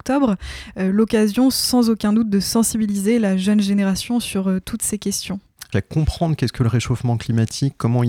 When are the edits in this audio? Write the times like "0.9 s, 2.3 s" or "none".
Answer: 5.7 s